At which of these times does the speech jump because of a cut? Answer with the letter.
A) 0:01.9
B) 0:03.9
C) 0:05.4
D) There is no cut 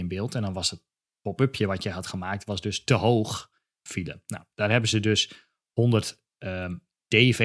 B